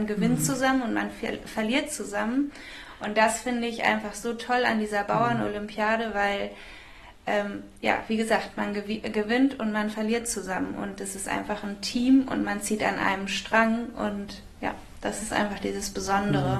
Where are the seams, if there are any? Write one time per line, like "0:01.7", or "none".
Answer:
none